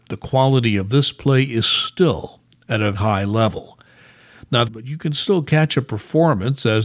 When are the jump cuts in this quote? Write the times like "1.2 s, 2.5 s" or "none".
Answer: 2.9 s, 4.7 s